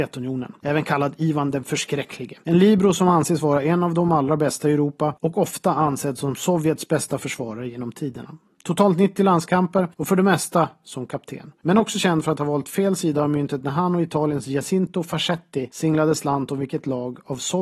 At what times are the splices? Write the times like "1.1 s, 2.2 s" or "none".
none